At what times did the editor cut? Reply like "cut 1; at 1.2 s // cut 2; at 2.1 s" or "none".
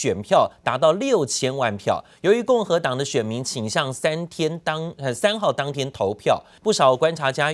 cut 1; at 6.6 s